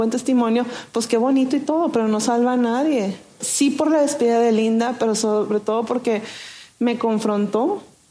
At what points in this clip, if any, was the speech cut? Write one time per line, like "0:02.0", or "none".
0:03.4